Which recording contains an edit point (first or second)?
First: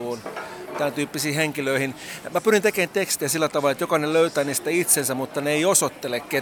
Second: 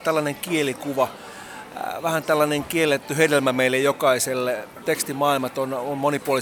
second